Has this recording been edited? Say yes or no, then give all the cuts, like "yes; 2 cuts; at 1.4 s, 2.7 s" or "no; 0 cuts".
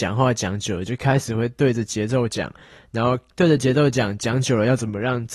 no; 0 cuts